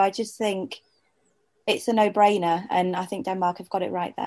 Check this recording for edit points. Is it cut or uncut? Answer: uncut